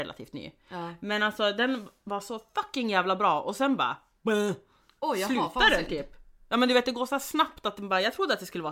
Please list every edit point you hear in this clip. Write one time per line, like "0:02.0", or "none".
none

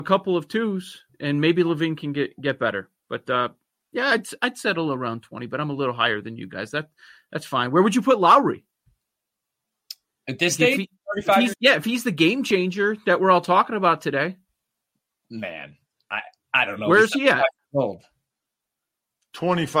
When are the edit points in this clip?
0:11.5

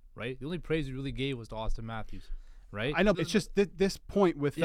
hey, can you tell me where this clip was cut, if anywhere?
0:03.1

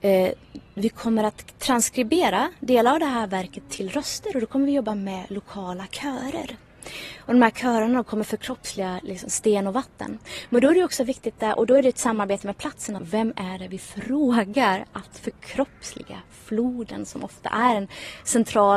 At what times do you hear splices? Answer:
0:13.0

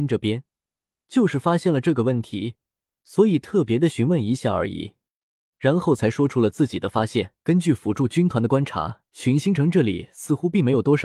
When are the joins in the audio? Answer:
0:05.5
0:07.4
0:09.1

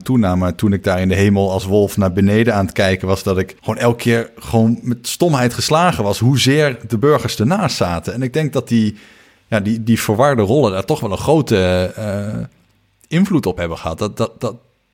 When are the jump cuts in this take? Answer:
0:03.6

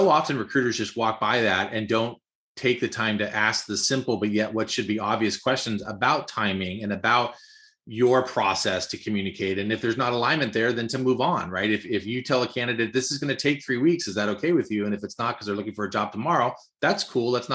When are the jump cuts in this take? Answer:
none

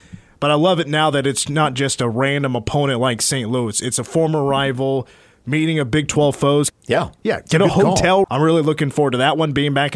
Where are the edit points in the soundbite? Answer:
0:06.7
0:08.2

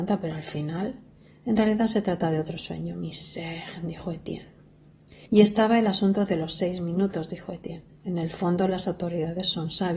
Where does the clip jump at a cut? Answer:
0:05.3

